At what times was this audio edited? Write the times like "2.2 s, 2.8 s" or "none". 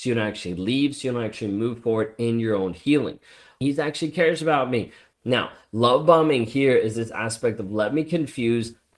3.6 s, 5.1 s